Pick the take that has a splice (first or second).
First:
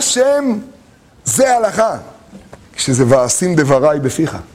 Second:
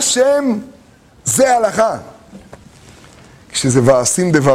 first